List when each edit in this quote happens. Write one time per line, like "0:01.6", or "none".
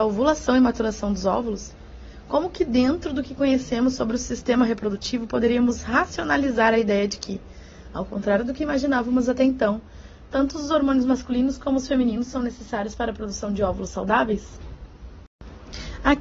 none